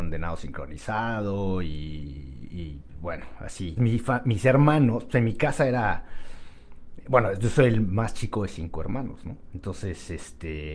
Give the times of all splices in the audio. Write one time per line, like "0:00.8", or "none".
0:03.8